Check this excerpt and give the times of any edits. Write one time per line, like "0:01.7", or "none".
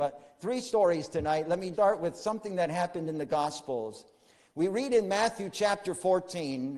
0:01.7